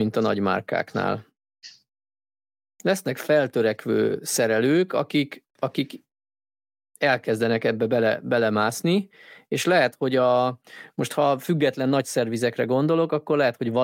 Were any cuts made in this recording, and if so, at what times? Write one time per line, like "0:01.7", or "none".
none